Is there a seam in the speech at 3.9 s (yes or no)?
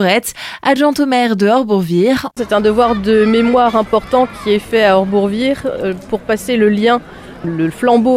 no